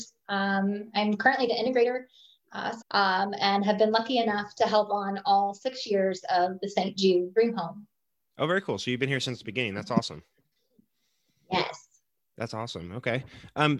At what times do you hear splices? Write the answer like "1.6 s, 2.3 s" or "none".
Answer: 2.8 s